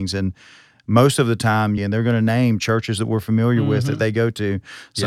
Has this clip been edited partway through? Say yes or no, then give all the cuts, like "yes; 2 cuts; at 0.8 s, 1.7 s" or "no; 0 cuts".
yes; 1 cut; at 1.8 s